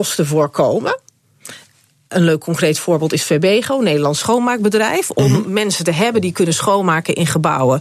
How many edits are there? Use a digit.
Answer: 0